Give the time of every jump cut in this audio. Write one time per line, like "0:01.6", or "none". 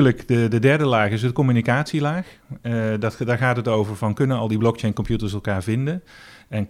none